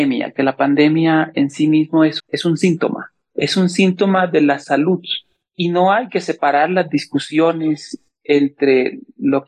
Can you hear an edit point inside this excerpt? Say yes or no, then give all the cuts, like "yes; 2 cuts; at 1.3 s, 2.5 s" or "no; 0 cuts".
yes; 1 cut; at 2.2 s